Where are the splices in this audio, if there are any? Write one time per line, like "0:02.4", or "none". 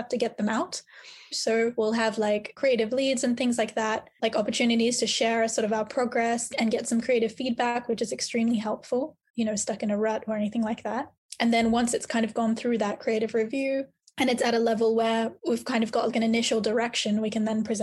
0:01.3
0:09.3